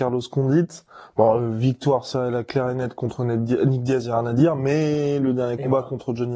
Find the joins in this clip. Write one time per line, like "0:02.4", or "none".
none